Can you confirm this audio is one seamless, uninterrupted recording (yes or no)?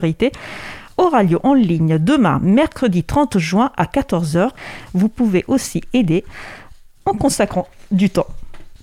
no